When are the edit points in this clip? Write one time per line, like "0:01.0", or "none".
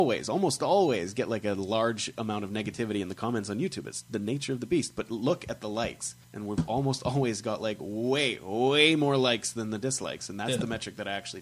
0:06.2